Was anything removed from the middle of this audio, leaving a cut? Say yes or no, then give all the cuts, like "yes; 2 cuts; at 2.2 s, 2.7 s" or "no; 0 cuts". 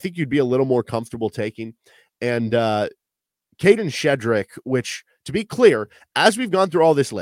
no; 0 cuts